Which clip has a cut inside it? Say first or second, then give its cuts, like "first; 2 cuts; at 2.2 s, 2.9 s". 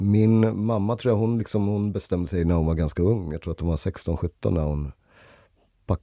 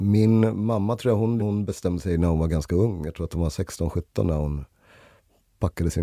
second; 1 cut; at 1.4 s